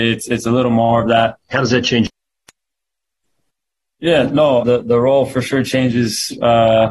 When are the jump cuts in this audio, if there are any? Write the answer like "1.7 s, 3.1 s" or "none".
1.5 s, 4.6 s